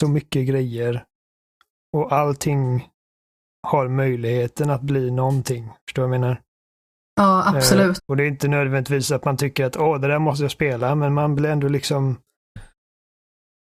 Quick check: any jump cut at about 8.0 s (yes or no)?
yes